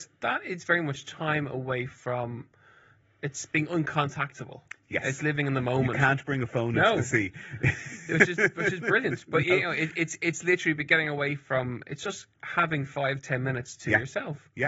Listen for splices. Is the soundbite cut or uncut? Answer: uncut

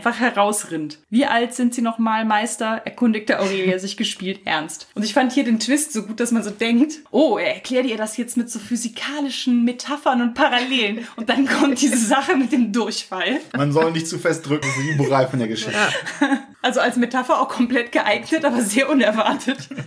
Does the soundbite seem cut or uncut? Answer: uncut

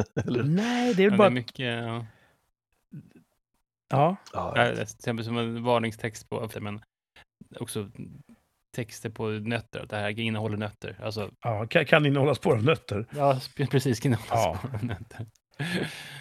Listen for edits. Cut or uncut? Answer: cut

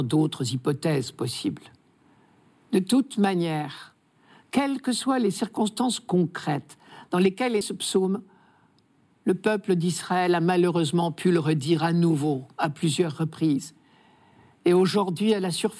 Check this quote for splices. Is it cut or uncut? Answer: cut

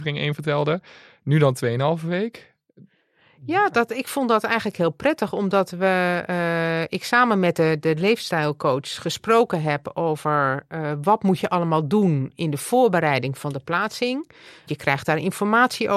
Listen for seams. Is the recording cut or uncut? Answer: uncut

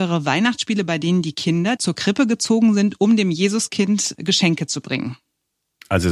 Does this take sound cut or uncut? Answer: cut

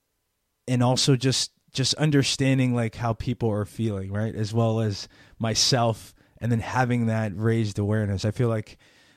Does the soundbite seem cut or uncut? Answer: uncut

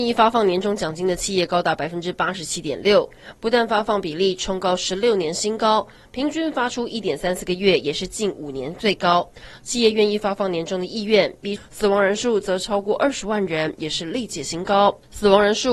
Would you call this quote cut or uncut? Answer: cut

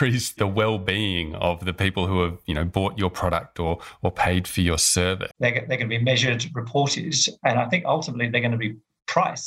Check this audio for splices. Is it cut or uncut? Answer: cut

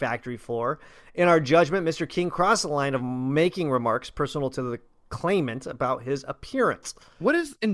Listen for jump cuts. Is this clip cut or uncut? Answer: uncut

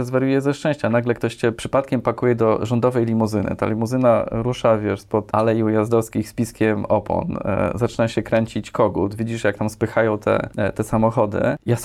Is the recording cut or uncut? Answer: uncut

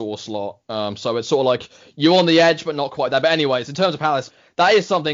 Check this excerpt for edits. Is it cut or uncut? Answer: uncut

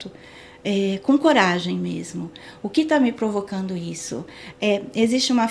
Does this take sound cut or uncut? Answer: cut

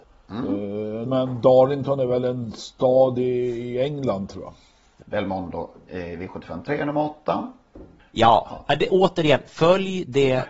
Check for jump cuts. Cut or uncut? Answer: cut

